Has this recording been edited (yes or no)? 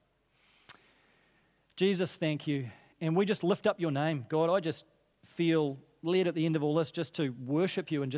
no